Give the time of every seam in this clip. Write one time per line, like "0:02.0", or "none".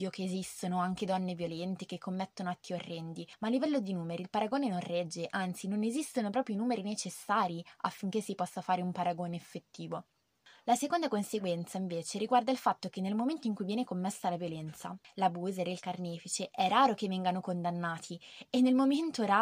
none